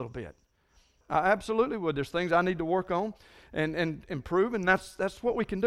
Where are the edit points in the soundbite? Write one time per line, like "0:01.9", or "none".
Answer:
0:01.0